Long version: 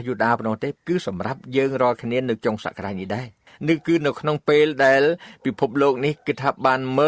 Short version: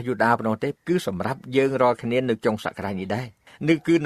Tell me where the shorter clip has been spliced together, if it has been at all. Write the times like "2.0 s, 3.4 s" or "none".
none